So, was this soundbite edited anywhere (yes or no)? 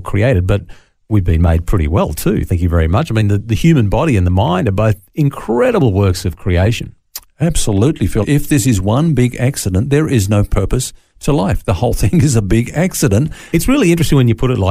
yes